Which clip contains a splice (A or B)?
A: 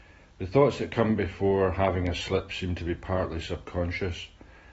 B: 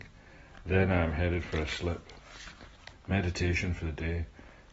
B